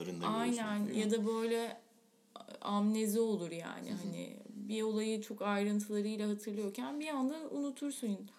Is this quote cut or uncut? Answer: uncut